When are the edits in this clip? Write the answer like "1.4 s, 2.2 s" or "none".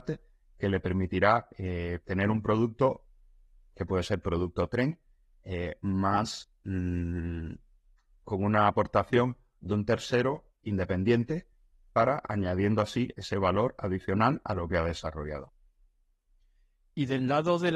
none